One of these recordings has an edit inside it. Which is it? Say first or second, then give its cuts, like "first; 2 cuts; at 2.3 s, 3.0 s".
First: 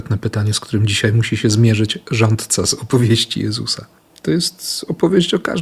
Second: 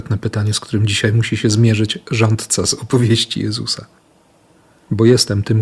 first; 1 cut; at 4.1 s